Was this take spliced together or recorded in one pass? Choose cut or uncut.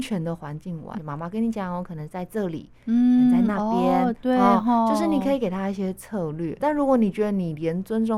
cut